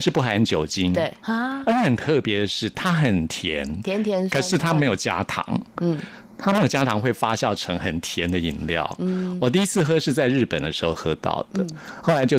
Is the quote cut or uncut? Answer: uncut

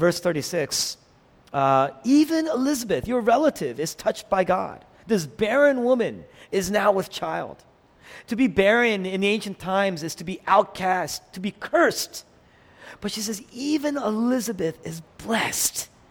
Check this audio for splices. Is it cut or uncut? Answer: uncut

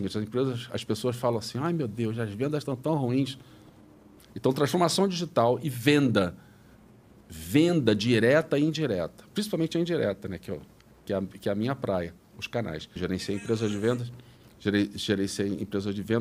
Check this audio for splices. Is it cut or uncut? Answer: cut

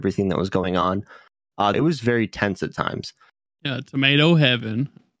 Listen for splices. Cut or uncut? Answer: cut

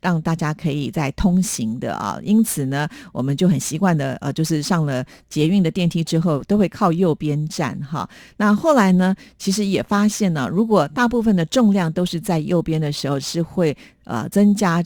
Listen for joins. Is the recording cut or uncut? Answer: uncut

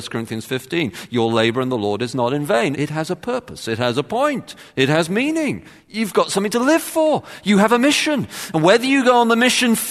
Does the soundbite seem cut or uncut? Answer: cut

